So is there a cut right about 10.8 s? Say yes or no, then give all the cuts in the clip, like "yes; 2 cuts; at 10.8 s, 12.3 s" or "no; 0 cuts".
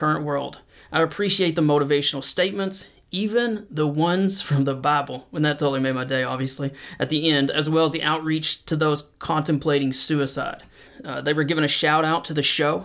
yes; 1 cut; at 10.8 s